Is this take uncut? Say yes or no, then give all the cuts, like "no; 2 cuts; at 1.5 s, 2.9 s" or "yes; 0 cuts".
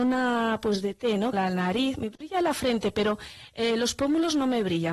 no; 1 cut; at 1.3 s